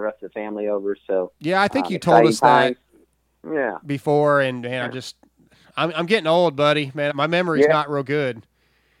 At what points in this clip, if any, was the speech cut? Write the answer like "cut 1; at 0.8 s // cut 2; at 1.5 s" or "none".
cut 1; at 7.1 s

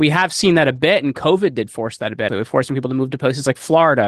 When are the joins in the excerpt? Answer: cut 1; at 2.3 s

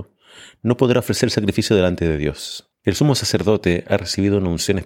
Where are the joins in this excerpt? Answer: cut 1; at 2.7 s

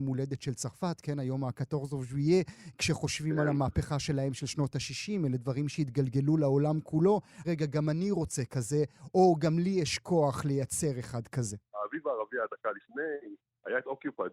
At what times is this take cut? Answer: cut 1; at 7.4 s // cut 2; at 11.7 s

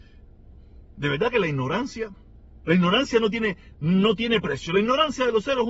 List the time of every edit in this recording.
none

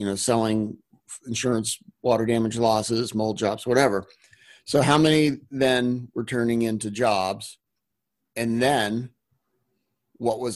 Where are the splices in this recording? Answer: none

